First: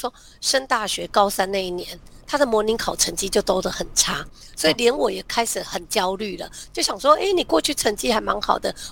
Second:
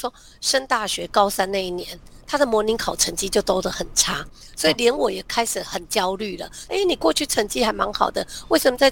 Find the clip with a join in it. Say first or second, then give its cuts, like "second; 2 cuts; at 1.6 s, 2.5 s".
second; 1 cut; at 6.7 s